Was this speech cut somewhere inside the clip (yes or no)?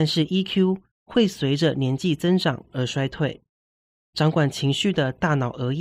no